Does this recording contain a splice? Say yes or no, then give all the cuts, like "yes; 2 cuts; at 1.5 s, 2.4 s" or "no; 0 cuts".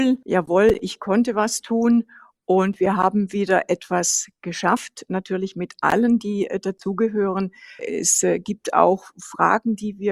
yes; 1 cut; at 7.8 s